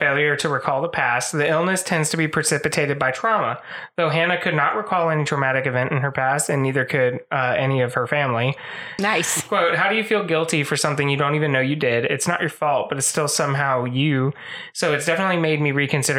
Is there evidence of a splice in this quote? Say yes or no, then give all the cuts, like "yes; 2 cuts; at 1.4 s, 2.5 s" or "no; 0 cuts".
yes; 1 cut; at 9.0 s